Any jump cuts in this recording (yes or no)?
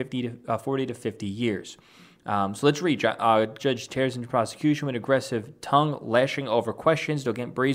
yes